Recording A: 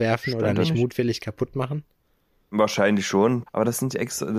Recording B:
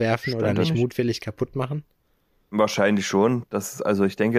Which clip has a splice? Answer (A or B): A